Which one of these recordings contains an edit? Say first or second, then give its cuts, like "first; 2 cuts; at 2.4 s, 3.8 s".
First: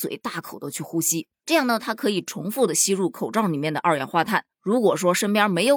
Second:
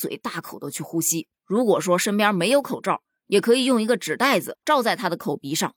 second; 2 cuts; at 1.4 s, 4.5 s